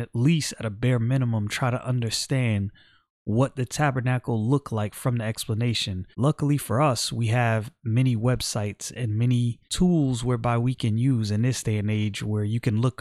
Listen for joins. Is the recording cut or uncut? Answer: cut